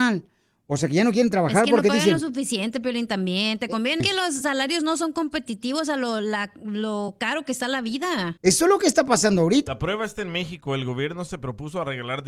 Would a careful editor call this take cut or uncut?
cut